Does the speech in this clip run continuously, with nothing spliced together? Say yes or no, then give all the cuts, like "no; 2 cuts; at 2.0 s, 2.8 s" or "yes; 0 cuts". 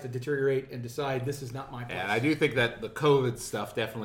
yes; 0 cuts